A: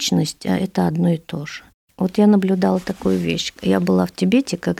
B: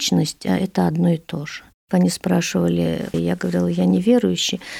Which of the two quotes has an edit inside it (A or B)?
B